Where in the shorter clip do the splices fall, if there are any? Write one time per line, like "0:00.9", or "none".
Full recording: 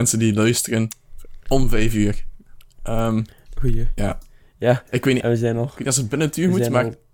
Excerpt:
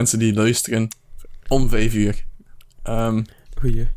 none